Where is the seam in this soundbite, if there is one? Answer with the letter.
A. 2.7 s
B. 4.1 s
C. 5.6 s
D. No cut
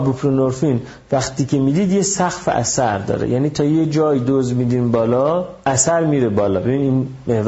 C